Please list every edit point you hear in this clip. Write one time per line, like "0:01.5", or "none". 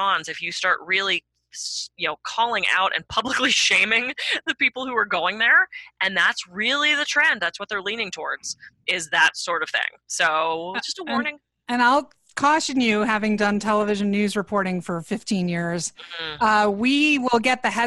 none

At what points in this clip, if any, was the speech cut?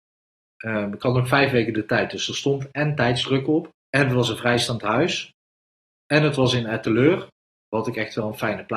0:03.8

